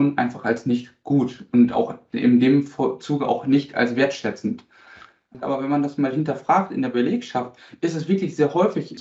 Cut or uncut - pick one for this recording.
cut